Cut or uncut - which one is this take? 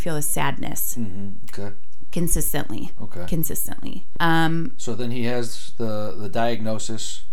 cut